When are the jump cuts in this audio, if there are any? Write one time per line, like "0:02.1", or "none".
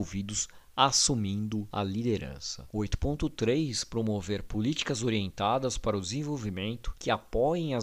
0:02.7